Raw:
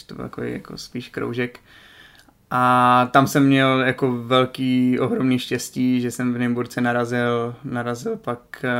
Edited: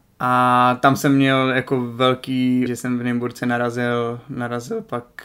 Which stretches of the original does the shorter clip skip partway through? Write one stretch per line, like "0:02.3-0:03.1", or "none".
0:05.0-0:06.0